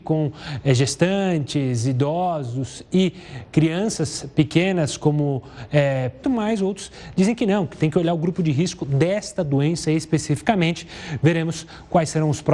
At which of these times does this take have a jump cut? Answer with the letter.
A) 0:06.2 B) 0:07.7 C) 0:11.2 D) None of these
A